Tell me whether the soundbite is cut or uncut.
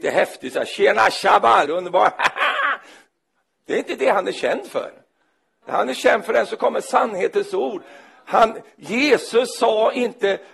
cut